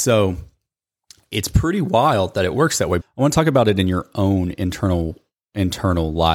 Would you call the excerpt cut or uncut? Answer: cut